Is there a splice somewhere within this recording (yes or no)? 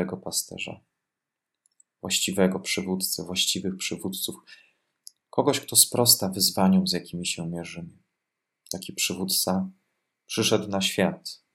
no